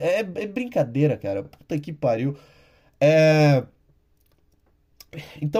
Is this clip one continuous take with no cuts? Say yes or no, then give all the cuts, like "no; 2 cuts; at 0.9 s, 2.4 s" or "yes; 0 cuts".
yes; 0 cuts